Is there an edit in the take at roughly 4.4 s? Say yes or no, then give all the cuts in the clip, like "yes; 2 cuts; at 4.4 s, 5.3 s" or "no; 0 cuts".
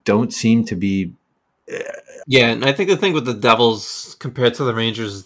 no; 1 cut; at 2.2 s